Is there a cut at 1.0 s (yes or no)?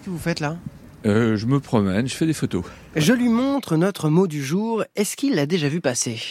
no